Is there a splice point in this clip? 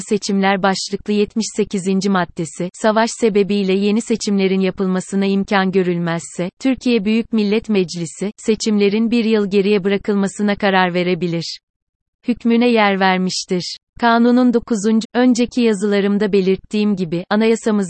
yes; 2 cuts; at 13.8 s, 15.0 s

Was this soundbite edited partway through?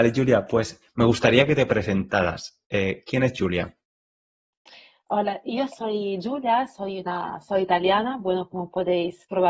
no; 0 cuts

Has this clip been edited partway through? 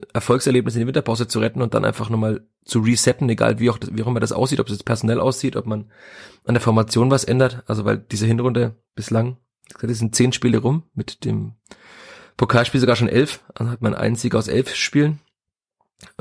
no; 0 cuts

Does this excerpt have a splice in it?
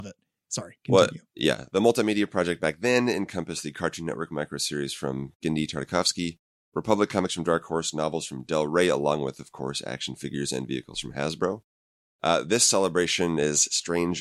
no; 0 cuts

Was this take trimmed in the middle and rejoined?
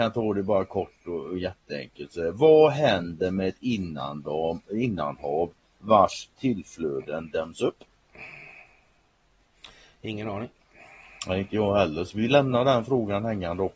no; 0 cuts

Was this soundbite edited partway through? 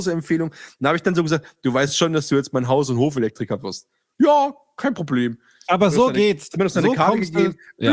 no; 0 cuts

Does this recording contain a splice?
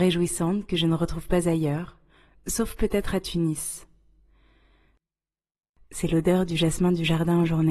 no; 0 cuts

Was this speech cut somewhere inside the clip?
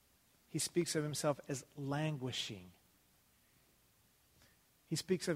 no; 0 cuts

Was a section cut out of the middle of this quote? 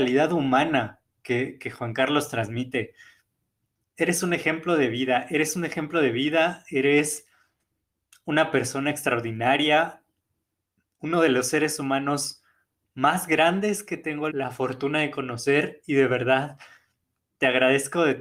yes; 2 cuts; at 3.8 s, 14.3 s

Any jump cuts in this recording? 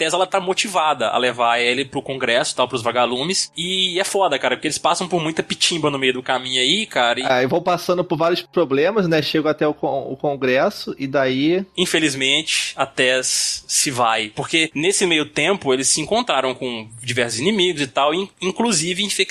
no; 0 cuts

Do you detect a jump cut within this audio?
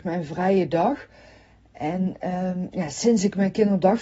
no; 0 cuts

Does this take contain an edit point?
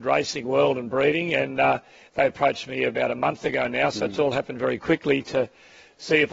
no; 0 cuts

